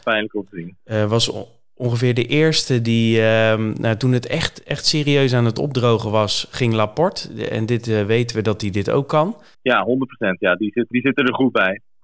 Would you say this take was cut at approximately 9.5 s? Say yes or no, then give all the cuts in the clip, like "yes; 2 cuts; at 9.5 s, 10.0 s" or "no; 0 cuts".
yes; 2 cuts; at 9.5 s, 10.9 s